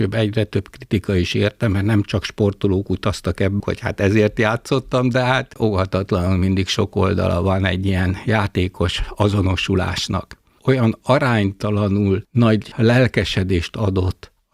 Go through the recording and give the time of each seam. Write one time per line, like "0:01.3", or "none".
0:03.6
0:10.6

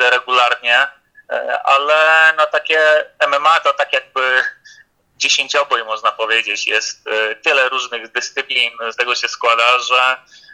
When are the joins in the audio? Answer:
0:08.9

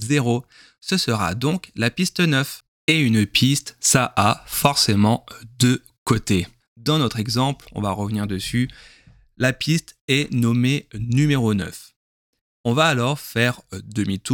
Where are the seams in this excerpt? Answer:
none

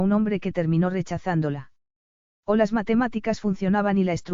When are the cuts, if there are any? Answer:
0:02.4

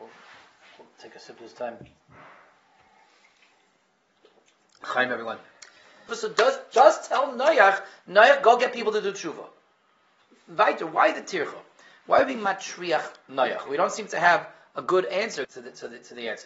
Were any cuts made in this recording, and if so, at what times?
0:06.1
0:13.7
0:15.4

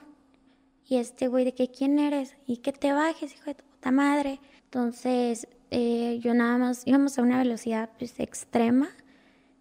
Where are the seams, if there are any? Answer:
0:04.6

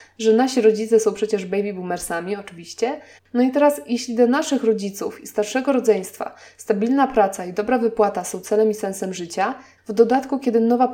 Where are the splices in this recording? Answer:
0:03.2
0:09.8

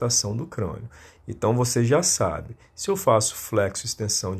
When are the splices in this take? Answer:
none

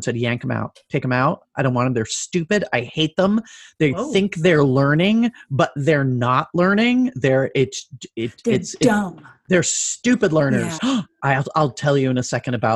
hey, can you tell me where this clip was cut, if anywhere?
0:10.8

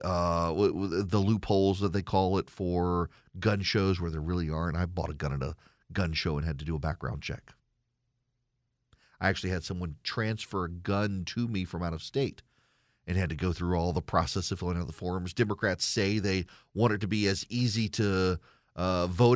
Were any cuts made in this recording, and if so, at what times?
none

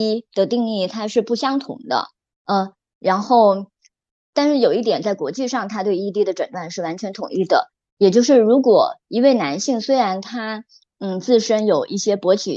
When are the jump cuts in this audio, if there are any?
none

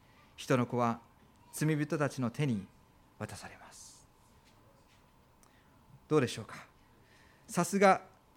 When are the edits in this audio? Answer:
none

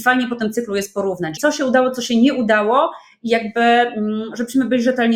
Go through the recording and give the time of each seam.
0:01.4

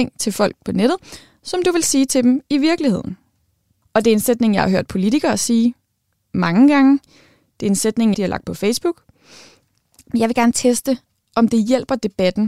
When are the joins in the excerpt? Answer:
0:03.8
0:08.1

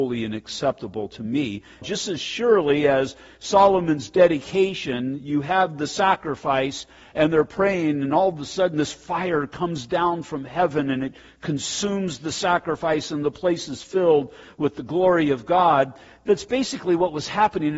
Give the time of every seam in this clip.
0:01.8

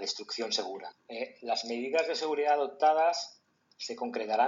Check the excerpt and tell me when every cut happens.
0:00.9

